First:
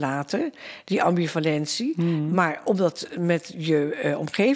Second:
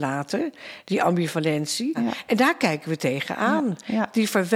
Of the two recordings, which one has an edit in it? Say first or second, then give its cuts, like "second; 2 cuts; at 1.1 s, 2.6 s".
second; 1 cut; at 1.9 s